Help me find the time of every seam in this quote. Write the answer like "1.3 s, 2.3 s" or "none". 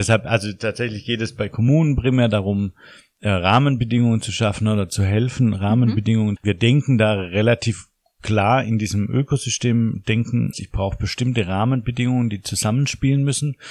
6.4 s, 10.5 s